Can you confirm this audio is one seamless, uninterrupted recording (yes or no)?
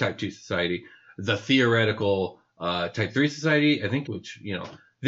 no